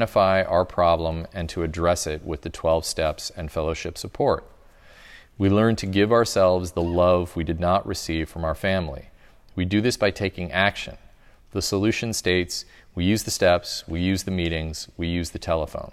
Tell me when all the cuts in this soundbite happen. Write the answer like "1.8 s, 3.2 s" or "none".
none